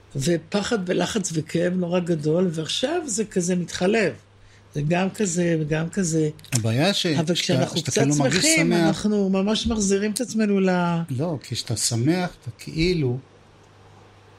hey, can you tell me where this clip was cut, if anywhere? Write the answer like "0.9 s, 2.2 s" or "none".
none